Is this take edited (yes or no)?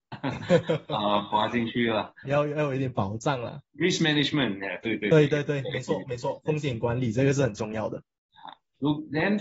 yes